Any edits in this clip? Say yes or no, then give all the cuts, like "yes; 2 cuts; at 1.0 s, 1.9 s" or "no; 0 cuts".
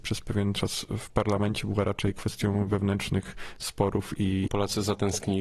yes; 1 cut; at 4.5 s